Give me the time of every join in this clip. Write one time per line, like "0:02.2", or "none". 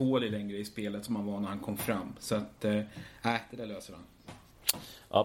none